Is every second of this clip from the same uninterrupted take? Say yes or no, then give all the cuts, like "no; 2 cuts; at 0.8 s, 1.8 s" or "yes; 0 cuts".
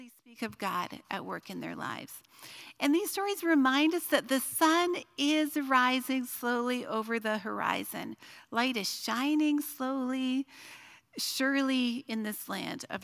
yes; 0 cuts